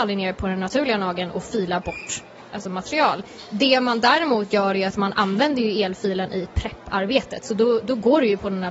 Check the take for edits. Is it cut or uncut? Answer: uncut